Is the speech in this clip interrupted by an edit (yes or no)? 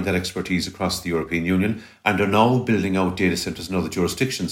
no